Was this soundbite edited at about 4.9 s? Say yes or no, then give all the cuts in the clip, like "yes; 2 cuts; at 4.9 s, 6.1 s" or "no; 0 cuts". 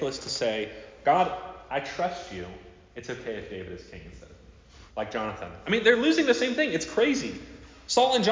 yes; 1 cut; at 4.9 s